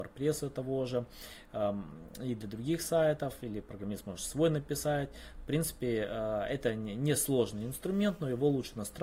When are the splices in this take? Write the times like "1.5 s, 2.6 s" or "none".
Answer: none